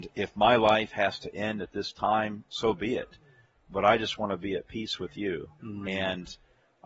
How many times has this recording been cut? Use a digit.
0